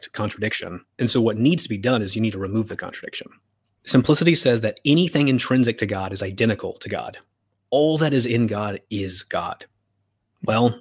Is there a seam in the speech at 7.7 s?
no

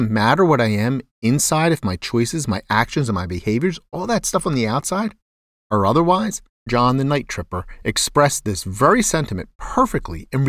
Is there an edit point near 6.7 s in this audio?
yes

